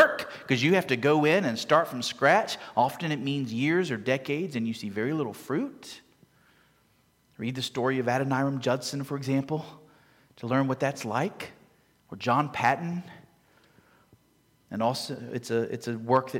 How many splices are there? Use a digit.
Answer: 0